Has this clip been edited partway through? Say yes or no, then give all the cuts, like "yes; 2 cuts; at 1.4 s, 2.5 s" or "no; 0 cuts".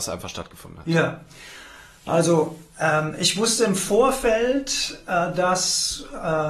no; 0 cuts